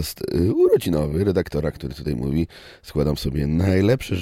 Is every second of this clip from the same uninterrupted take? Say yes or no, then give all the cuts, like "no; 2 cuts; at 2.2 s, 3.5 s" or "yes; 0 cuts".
yes; 0 cuts